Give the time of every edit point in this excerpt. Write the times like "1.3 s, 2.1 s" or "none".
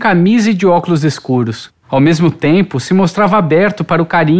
1.8 s